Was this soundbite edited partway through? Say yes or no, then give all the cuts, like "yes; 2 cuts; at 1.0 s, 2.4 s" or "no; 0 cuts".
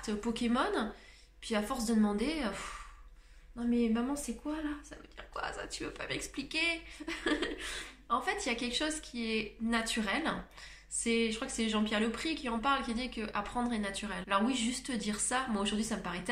yes; 1 cut; at 14.2 s